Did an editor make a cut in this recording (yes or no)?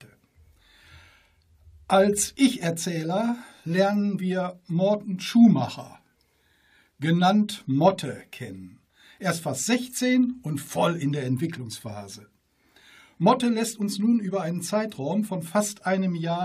no